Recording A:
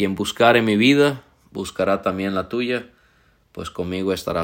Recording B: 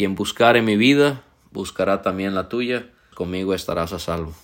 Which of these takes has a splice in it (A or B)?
B